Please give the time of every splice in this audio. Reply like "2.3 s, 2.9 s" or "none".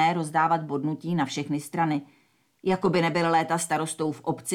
none